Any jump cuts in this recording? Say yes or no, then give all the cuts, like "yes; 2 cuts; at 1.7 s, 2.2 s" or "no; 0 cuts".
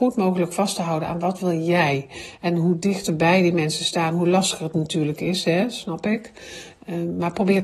no; 0 cuts